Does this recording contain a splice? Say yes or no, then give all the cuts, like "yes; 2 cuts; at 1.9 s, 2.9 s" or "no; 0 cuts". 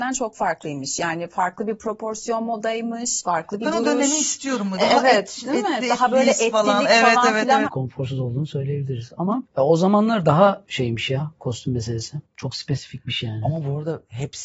yes; 1 cut; at 7.6 s